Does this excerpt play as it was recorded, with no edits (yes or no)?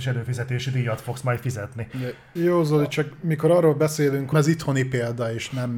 no